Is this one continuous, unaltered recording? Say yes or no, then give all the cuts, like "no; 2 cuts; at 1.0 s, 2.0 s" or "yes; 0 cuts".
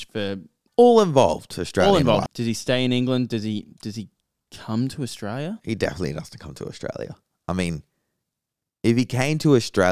no; 1 cut; at 2.3 s